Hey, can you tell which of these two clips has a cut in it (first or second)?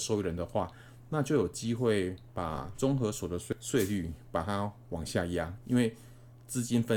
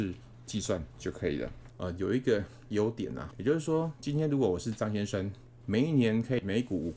second